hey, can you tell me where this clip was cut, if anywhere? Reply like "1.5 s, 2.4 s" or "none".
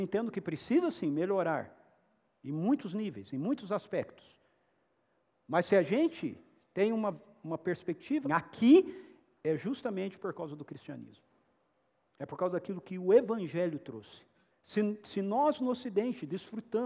8.2 s, 14.5 s